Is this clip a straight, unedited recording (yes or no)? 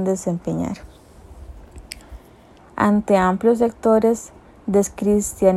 no